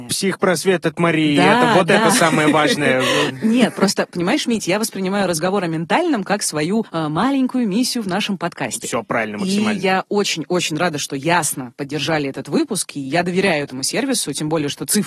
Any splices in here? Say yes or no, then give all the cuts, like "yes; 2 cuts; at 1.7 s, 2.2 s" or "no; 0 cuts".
no; 0 cuts